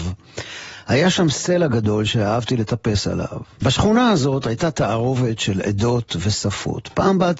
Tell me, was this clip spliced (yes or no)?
yes